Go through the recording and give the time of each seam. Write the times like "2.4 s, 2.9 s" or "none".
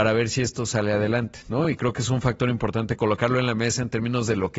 none